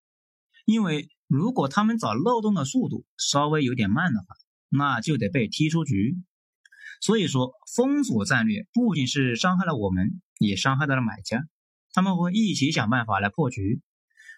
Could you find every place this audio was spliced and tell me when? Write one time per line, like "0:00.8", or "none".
0:08.9